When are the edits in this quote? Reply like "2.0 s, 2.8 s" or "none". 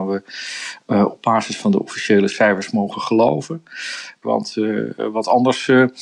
4.2 s